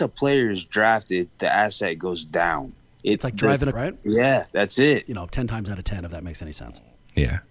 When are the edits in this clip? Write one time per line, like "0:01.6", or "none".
0:03.7
0:05.1